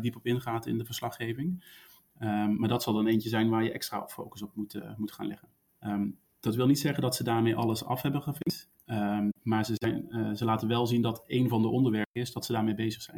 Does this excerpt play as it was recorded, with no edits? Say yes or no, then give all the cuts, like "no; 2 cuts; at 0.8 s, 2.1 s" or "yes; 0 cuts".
no; 1 cut; at 5.7 s